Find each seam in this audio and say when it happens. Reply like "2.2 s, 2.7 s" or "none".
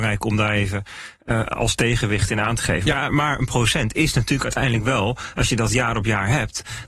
3.1 s